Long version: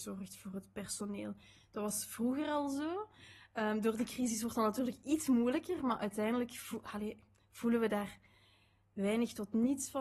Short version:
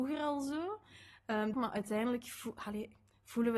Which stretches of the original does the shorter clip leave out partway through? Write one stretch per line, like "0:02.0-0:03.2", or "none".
0:03.8-0:05.8